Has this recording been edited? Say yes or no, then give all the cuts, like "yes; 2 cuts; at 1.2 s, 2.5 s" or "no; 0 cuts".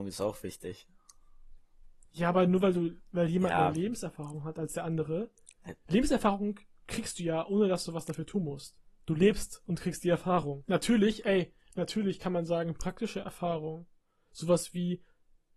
yes; 1 cut; at 10.7 s